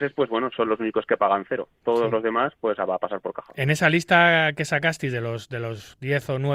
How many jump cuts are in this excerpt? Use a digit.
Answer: 0